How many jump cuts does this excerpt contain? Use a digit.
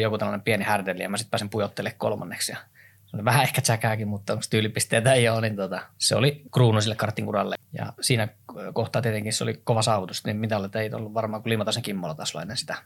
1